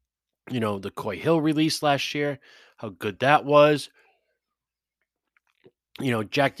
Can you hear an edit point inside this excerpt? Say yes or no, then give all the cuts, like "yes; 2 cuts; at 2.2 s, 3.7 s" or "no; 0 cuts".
no; 0 cuts